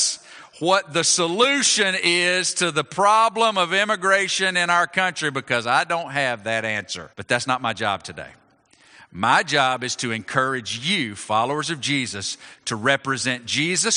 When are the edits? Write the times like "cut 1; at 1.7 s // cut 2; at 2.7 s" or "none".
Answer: cut 1; at 7.1 s